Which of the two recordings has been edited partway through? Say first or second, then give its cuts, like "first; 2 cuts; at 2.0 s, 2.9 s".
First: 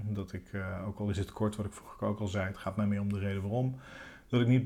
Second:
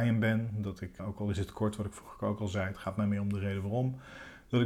second; 1 cut; at 1.0 s